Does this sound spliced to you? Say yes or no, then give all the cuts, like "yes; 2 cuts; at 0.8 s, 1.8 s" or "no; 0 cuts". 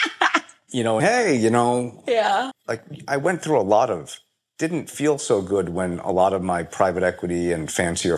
yes; 2 cuts; at 1.0 s, 2.5 s